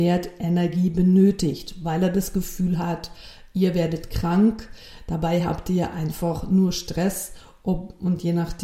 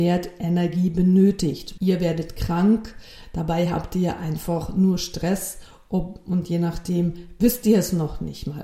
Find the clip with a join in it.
second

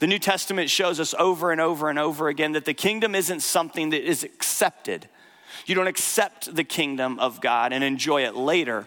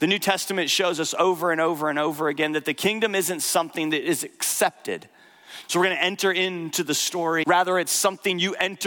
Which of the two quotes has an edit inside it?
second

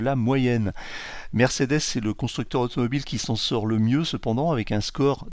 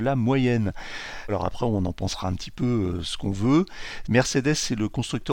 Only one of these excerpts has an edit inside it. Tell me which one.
second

